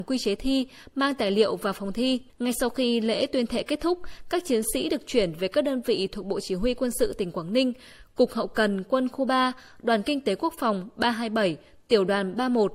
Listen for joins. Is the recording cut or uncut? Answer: cut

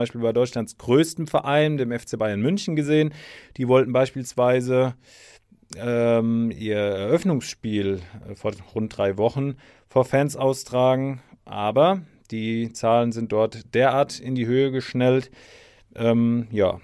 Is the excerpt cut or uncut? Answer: uncut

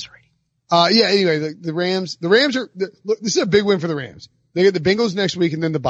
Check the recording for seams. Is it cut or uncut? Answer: uncut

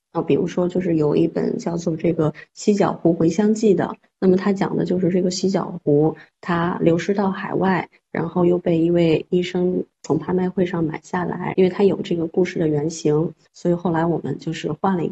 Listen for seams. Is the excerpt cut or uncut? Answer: cut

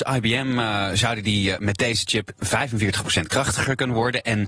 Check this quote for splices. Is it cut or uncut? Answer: uncut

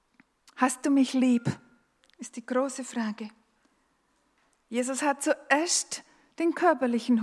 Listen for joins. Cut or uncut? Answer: uncut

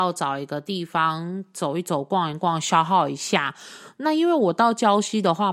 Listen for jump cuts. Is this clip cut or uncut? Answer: uncut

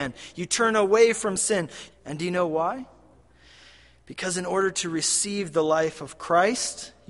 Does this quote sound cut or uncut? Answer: cut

